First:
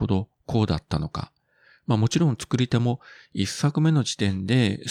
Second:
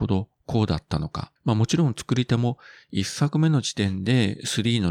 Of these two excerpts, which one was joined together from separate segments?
second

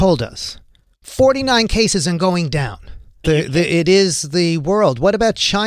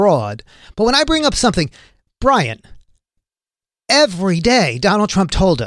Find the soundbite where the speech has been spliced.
first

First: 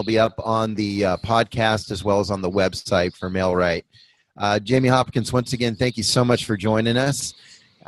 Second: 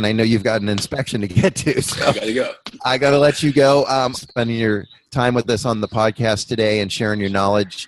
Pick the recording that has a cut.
second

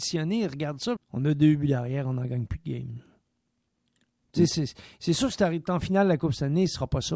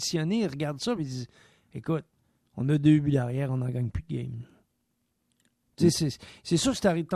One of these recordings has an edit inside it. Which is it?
first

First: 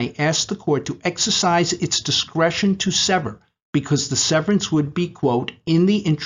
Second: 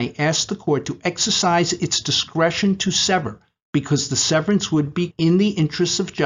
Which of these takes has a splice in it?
second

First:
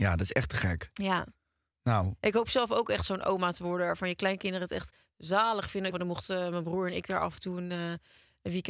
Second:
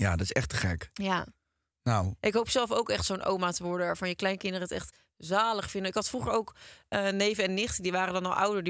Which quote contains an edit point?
first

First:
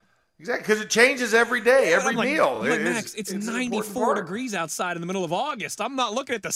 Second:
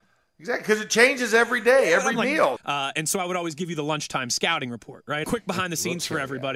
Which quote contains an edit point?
second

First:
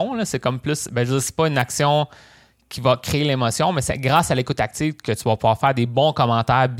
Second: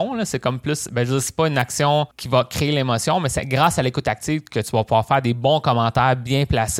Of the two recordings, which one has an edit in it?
second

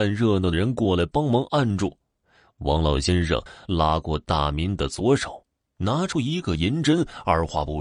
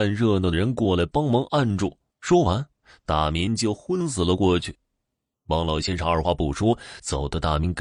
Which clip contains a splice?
second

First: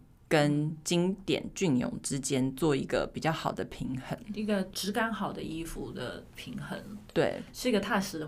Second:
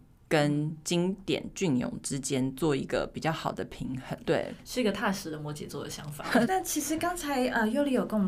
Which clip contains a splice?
second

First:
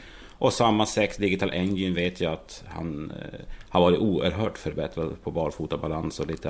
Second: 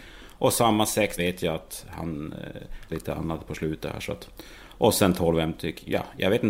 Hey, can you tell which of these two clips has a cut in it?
second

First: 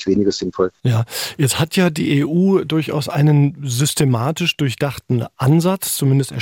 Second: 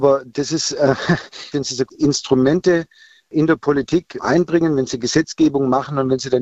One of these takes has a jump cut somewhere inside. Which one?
second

